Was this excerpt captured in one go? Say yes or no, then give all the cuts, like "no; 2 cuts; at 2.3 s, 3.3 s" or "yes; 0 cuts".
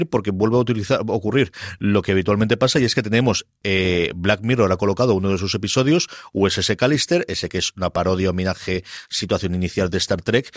yes; 0 cuts